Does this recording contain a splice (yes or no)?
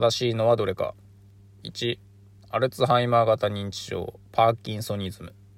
no